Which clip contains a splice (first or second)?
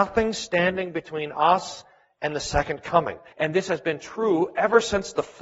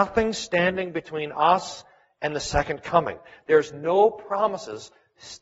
first